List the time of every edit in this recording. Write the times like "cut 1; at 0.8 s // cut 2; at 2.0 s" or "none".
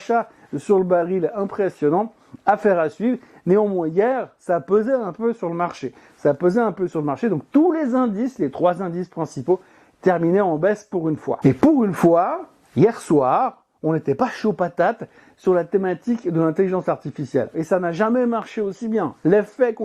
cut 1; at 17.5 s